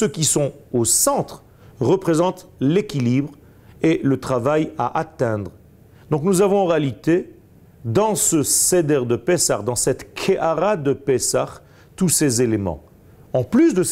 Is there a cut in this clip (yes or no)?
no